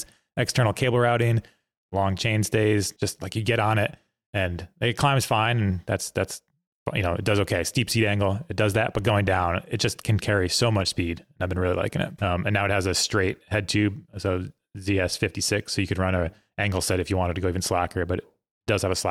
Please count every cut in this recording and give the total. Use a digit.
2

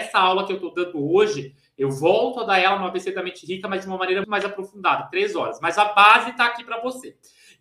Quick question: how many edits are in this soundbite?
1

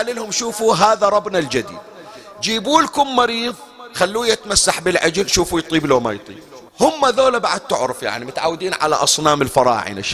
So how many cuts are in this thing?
1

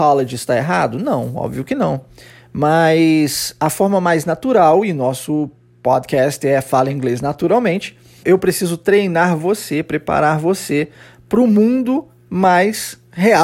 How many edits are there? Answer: 1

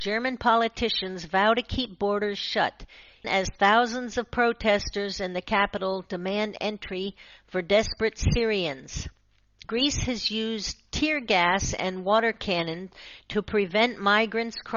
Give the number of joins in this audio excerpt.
2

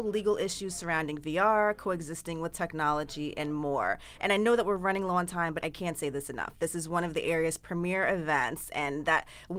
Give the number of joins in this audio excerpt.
1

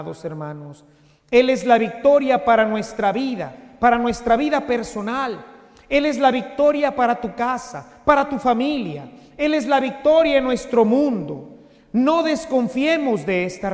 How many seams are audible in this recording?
0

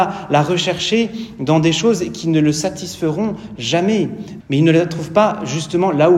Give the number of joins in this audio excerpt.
1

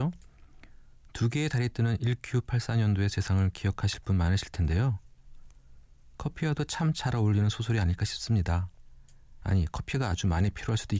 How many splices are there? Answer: 0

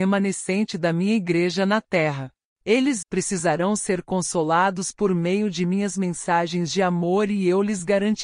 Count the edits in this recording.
1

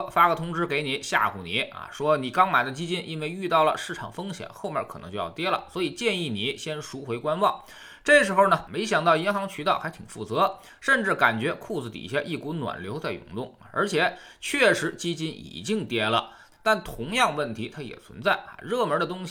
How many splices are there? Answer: 2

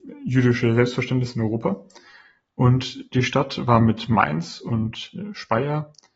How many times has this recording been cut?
0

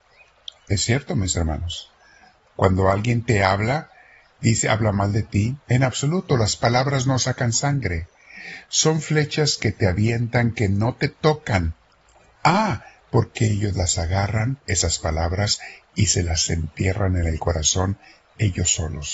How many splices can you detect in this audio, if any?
2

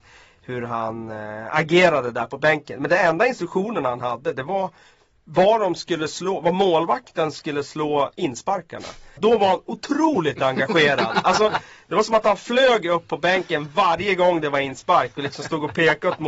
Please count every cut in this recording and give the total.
1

